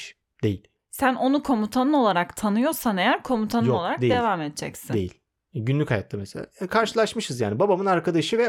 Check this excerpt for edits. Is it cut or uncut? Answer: uncut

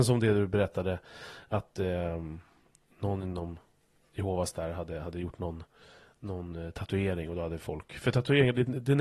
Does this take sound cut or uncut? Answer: uncut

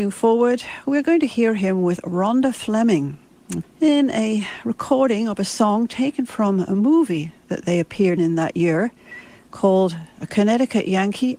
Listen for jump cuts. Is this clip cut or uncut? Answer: cut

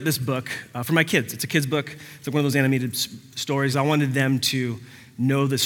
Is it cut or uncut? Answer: uncut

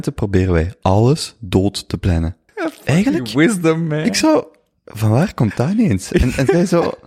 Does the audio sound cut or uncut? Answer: cut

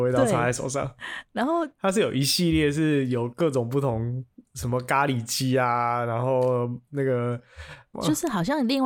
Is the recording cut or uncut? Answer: cut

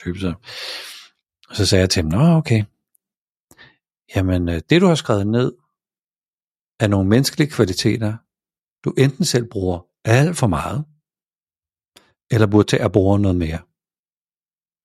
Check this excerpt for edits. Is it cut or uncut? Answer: uncut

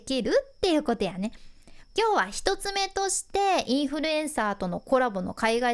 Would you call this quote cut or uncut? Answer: cut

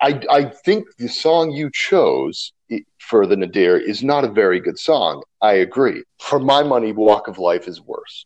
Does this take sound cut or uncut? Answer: cut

